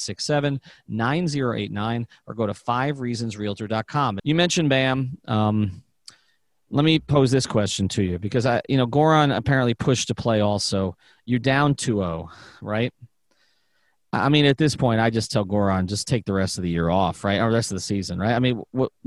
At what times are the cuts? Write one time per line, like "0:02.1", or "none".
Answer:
0:04.2

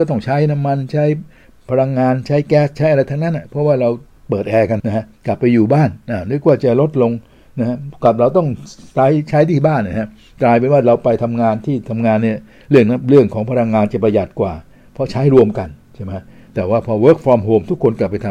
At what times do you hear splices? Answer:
0:04.8

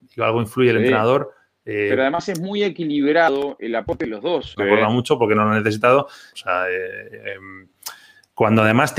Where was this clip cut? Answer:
0:04.6
0:06.3

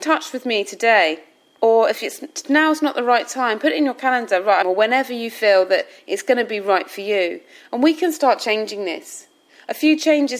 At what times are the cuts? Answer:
0:04.6

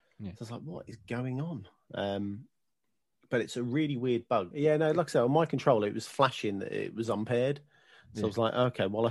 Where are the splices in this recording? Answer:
0:04.5

